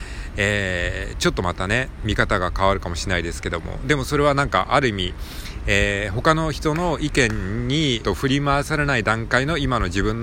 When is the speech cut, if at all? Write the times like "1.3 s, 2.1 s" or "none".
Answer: 8.0 s